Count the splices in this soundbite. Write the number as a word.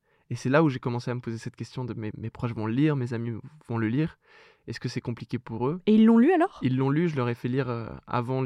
one